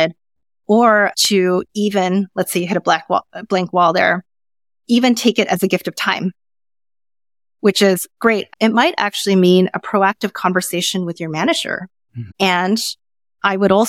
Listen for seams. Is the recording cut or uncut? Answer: cut